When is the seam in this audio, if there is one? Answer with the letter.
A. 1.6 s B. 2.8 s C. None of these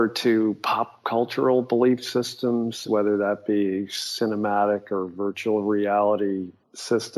B